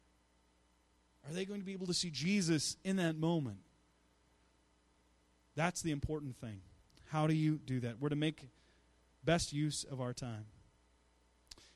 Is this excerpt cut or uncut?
uncut